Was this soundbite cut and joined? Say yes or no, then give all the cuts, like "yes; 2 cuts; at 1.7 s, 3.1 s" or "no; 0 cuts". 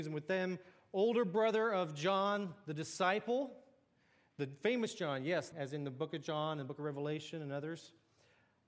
yes; 1 cut; at 5.5 s